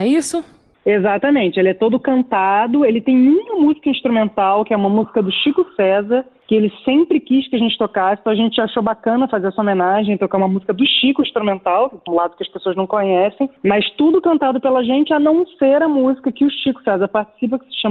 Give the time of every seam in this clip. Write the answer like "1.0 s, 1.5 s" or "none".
12.1 s